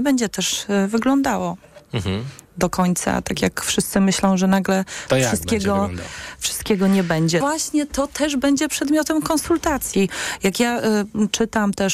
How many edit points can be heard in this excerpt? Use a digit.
2